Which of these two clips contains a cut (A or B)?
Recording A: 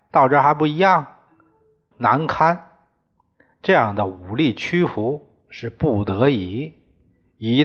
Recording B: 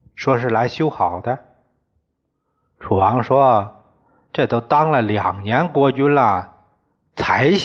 A